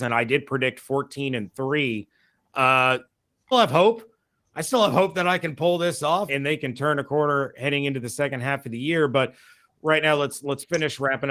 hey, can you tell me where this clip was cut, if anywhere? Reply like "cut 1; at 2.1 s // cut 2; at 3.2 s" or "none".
cut 1; at 3.5 s // cut 2; at 6.3 s